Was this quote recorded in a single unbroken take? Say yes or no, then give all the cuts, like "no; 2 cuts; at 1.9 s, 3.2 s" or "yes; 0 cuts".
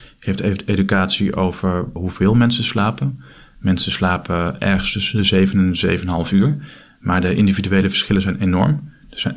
yes; 0 cuts